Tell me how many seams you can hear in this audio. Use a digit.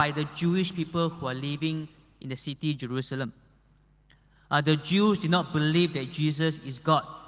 0